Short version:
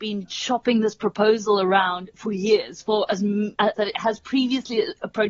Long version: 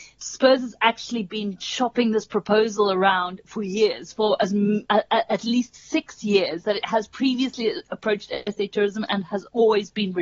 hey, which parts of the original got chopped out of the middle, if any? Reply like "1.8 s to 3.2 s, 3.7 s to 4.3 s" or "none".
5.0 s to 6.6 s

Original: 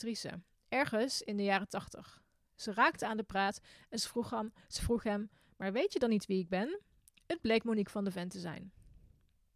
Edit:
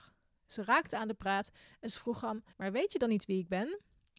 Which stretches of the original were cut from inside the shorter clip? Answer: 4.6 s to 5.5 s

